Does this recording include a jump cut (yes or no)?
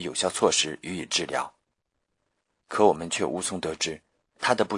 no